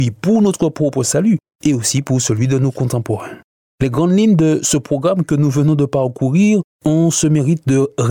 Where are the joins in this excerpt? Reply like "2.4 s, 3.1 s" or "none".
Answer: none